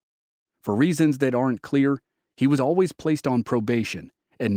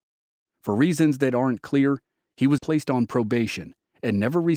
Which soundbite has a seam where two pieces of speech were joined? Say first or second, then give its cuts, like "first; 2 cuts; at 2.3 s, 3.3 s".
second; 1 cut; at 2.6 s